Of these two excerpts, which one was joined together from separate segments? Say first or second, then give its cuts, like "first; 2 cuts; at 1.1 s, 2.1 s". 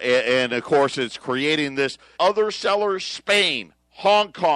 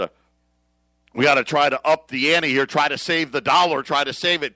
first; 1 cut; at 2.2 s